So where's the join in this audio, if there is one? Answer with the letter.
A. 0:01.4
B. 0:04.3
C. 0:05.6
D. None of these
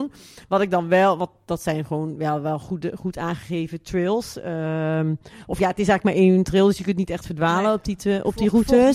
D